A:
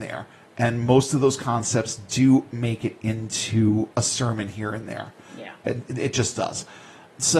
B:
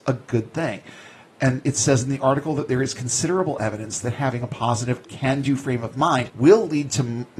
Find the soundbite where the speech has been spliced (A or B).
B